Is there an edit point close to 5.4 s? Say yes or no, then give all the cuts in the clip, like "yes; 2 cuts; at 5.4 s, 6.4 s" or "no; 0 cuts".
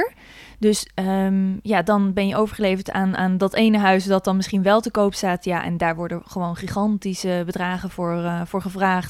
no; 0 cuts